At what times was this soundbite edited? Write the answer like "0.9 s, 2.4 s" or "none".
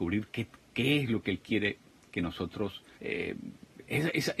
3.0 s